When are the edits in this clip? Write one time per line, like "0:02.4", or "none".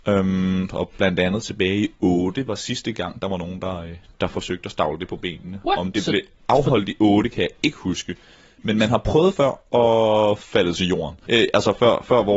0:11.2